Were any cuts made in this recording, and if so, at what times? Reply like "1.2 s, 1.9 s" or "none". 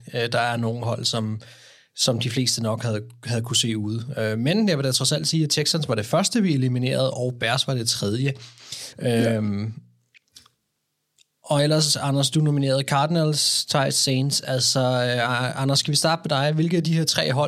8.9 s